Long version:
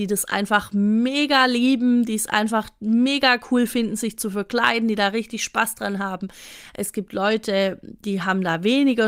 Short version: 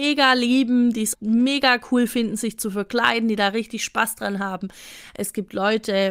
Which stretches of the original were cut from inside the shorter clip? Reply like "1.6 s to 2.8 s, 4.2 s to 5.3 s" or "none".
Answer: 2.3 s to 2.7 s

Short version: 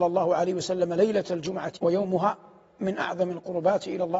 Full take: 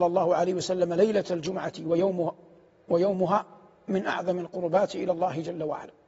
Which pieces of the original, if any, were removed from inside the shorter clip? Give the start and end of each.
1.8 s to 2.8 s

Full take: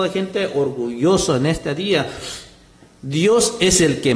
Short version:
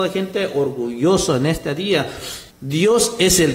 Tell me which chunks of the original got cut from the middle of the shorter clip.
2.5 s to 2.9 s

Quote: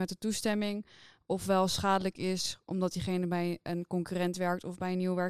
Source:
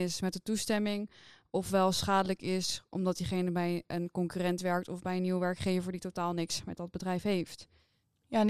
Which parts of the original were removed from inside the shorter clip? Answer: none

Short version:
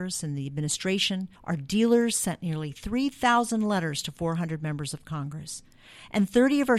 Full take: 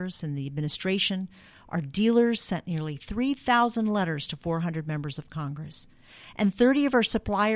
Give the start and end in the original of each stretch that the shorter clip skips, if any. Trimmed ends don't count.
1.4 s to 1.6 s

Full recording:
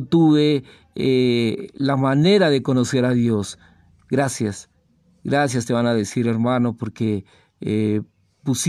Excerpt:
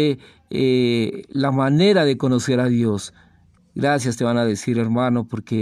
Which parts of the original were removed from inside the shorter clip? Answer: 4.0 s to 5.1 s

